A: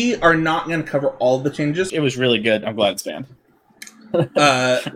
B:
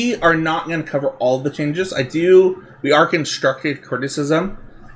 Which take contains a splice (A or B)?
A